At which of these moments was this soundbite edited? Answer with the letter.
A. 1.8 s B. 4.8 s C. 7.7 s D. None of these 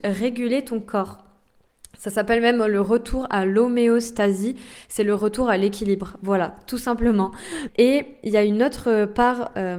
C